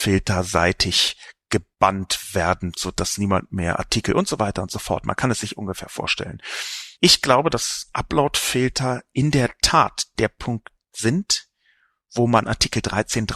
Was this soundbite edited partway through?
no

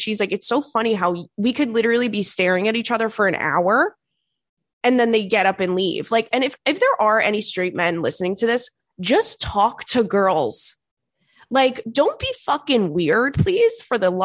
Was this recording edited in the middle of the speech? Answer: no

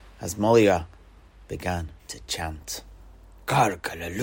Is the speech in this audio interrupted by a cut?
yes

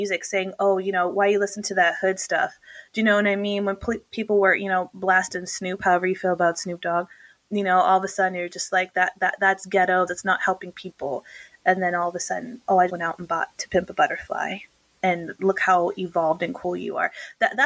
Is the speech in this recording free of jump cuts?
no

